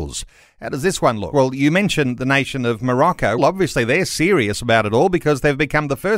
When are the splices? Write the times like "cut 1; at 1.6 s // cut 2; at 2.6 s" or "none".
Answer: cut 1; at 1.3 s // cut 2; at 3.4 s